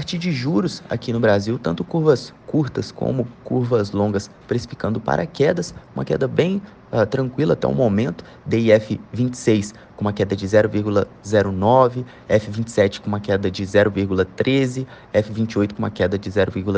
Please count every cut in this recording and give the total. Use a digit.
0